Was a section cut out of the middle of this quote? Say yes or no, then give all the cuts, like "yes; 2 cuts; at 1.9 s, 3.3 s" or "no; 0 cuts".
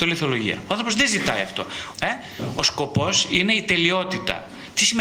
yes; 1 cut; at 1.9 s